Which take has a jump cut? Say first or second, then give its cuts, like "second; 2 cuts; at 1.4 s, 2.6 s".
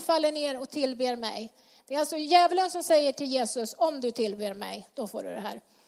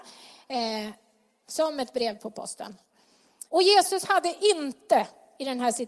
second; 2 cuts; at 1.4 s, 3.5 s